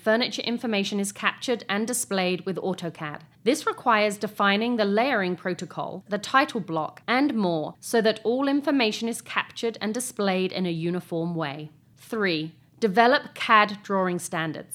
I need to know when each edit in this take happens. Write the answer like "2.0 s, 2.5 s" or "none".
6.1 s, 11.8 s

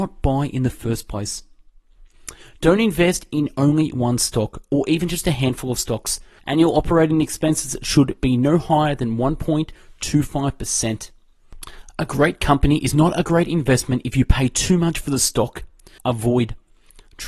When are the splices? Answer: 6.4 s, 16.0 s

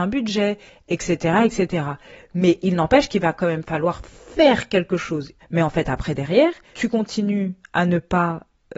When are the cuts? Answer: 5.4 s, 6.7 s

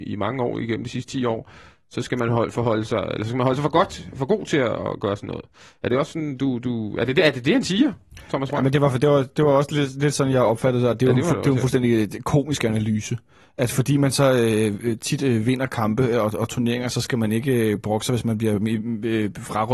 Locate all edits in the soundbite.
none

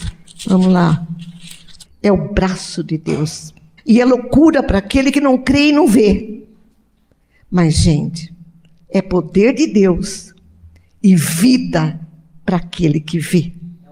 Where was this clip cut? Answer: 1.8 s, 3.8 s

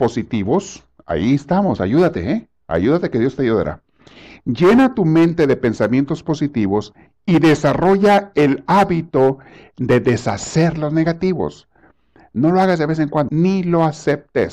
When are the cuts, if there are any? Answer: 13.3 s

